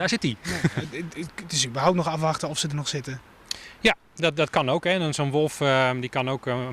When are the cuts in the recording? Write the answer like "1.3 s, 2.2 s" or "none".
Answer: none